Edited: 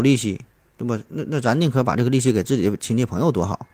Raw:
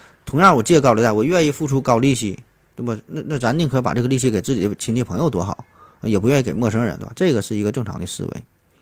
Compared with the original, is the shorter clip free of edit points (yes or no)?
yes